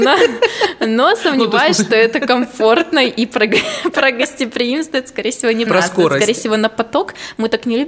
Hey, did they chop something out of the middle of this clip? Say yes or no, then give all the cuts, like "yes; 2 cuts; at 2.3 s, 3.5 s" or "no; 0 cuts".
yes; 1 cut; at 5.7 s